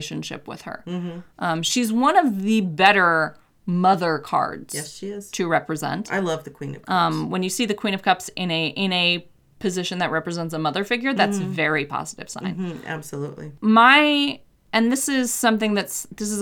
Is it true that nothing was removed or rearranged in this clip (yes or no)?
yes